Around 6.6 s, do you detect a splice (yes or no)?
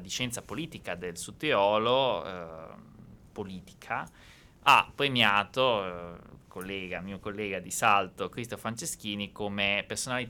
no